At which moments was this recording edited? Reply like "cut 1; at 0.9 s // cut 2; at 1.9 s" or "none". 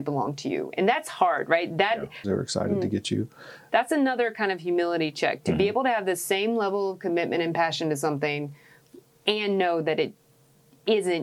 cut 1; at 2.2 s // cut 2; at 3.7 s